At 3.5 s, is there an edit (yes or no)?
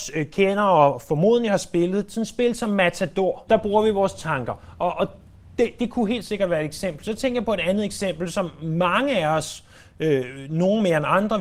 yes